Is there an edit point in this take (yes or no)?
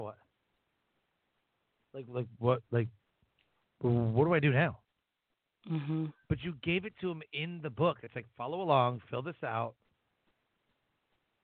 no